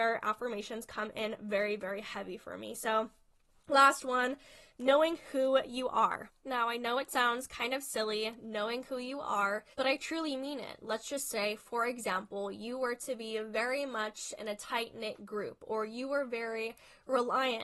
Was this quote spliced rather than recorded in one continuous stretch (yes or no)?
yes